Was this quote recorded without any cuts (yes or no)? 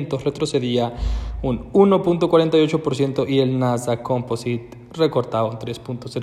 yes